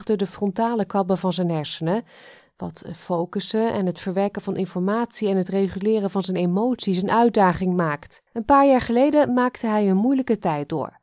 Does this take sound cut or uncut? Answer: cut